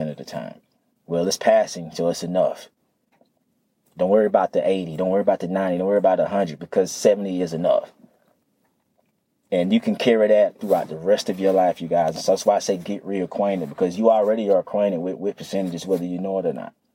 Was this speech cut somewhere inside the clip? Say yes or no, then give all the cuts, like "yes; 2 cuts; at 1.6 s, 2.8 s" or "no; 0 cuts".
no; 0 cuts